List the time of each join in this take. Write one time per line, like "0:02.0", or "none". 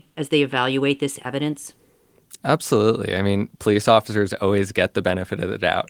0:03.5